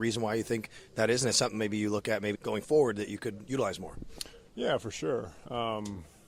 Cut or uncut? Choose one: cut